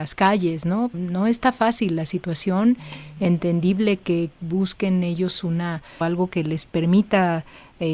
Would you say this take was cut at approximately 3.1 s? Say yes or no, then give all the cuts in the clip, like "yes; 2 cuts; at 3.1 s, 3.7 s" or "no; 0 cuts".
no; 2 cuts; at 0.9 s, 6.0 s